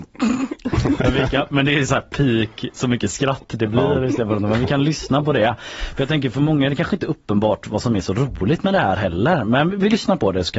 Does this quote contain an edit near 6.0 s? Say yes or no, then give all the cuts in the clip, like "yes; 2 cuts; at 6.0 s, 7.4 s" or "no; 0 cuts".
no; 0 cuts